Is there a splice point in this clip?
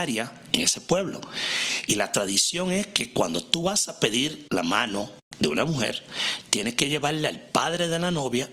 no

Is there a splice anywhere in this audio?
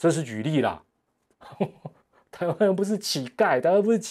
yes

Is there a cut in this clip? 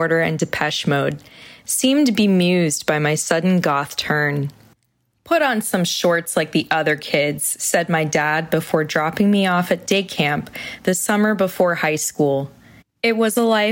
yes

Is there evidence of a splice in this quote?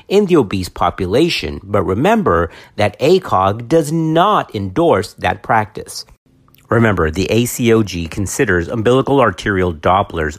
no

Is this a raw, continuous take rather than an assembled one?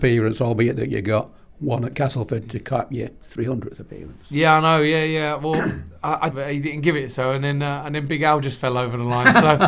no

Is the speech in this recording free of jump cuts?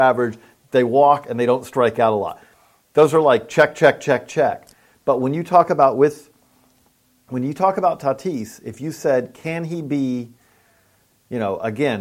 yes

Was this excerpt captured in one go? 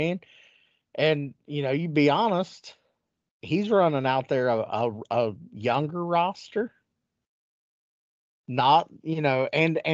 yes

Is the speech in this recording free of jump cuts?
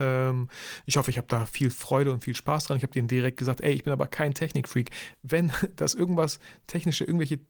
yes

